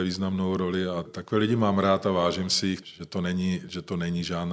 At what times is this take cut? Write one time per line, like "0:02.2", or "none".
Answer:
0:01.1
0:02.8